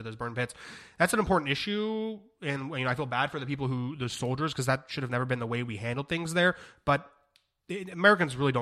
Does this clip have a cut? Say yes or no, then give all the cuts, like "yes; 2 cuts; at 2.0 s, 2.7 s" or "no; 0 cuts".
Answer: no; 0 cuts